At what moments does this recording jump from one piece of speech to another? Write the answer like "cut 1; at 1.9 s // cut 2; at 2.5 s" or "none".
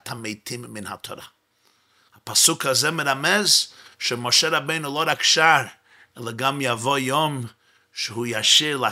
none